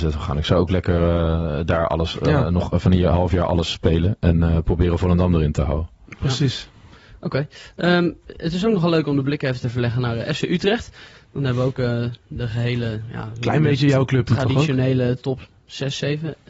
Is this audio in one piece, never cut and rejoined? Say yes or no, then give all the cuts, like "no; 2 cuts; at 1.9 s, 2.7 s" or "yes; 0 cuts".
yes; 0 cuts